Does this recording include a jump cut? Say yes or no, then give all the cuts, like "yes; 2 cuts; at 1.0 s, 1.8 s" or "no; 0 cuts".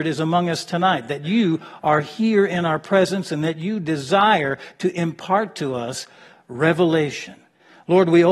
no; 0 cuts